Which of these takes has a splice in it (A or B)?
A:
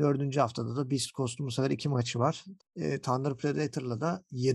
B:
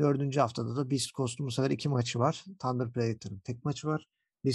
A